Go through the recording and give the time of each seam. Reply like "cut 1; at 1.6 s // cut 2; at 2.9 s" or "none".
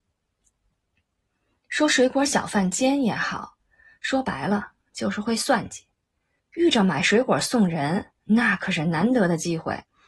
cut 1; at 6.4 s

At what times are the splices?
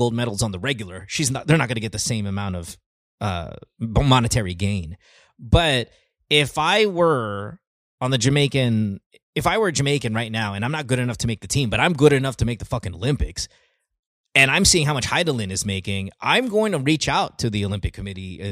none

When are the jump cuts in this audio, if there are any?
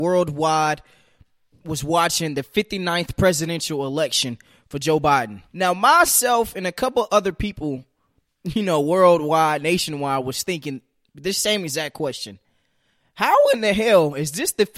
cut 1; at 5.5 s

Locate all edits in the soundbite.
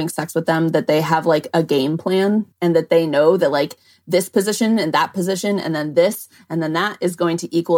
cut 1; at 2.5 s

